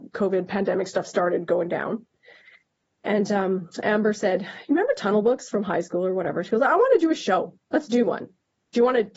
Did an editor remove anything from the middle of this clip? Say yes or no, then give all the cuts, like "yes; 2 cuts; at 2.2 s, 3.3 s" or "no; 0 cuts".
no; 0 cuts